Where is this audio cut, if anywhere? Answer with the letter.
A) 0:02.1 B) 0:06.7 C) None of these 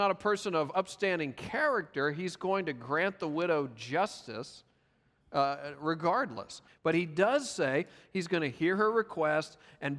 B